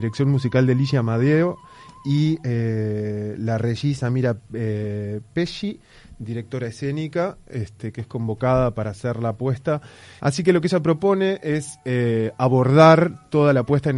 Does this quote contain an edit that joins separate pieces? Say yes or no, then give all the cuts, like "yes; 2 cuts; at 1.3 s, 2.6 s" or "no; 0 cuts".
yes; 1 cut; at 10.2 s